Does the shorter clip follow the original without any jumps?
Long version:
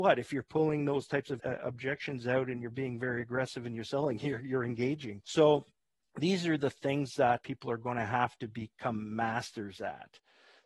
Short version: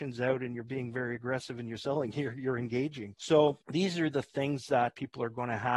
no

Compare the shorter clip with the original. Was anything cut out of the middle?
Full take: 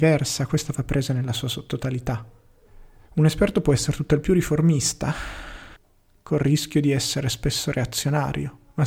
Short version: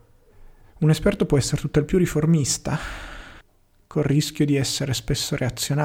no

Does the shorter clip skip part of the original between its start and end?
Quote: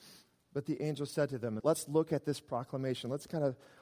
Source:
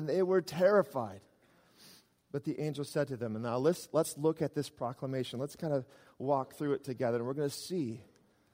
yes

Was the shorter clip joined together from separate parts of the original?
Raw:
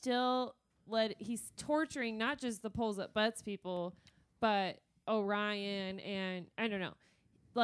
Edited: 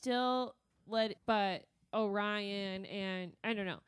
yes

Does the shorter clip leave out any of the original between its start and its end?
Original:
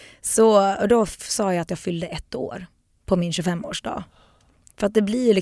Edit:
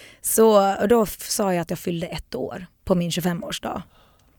yes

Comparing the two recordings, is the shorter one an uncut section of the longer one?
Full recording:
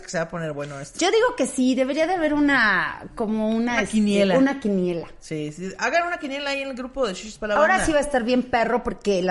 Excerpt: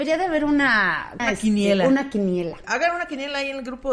no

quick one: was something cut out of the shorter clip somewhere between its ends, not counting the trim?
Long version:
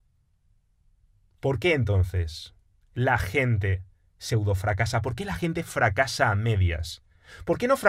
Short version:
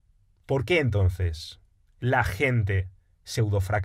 no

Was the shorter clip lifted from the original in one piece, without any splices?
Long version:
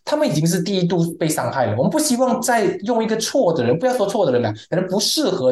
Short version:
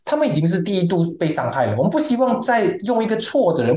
yes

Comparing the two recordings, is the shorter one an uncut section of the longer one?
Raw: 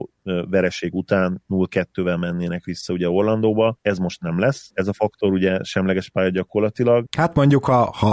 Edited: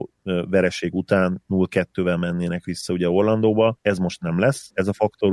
yes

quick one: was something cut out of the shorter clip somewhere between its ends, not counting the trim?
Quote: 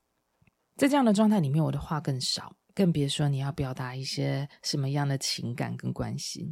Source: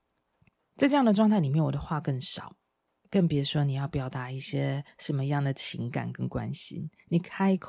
yes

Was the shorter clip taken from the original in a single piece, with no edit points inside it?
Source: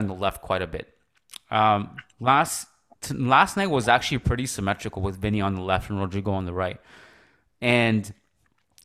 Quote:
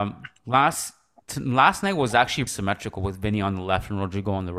no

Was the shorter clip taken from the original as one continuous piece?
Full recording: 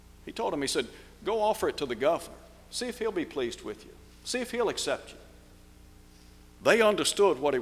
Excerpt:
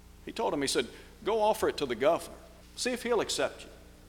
no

